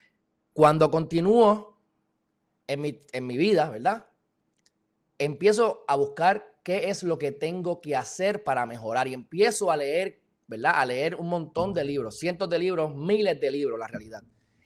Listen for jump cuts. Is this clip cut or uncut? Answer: uncut